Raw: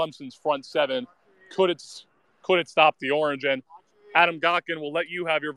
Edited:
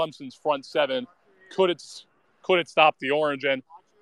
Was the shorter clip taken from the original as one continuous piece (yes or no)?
yes